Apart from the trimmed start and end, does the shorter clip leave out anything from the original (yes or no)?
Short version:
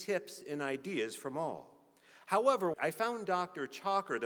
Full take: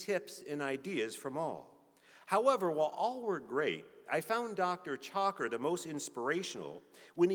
yes